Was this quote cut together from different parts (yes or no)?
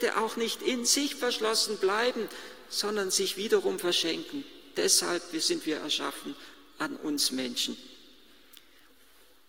no